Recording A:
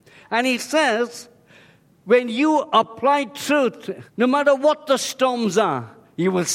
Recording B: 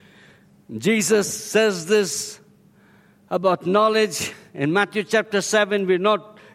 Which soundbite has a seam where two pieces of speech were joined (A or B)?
A